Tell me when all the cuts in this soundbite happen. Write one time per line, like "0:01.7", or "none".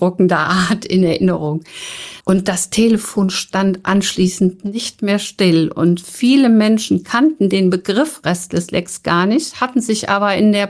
0:02.2